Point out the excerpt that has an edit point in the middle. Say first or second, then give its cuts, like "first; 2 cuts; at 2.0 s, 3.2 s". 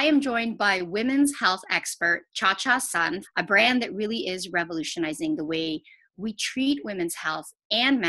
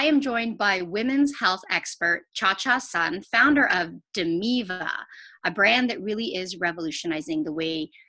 first; 1 cut; at 3.2 s